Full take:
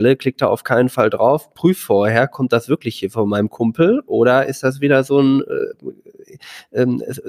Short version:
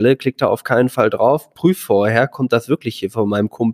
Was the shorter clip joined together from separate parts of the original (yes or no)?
no